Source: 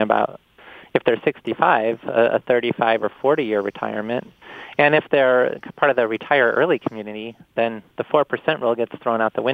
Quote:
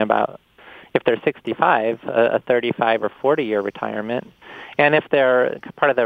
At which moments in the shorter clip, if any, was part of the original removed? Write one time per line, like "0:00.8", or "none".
none